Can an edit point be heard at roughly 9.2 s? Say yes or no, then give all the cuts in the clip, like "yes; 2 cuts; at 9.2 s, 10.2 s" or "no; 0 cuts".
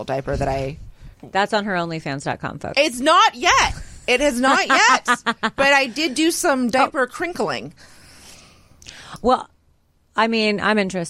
no; 1 cut; at 1.1 s